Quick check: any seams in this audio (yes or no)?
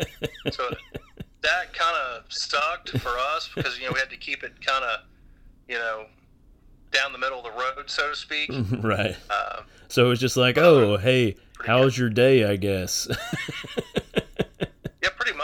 no